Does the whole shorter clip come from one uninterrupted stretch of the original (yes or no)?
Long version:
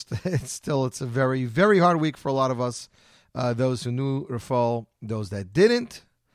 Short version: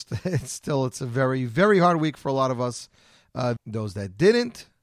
no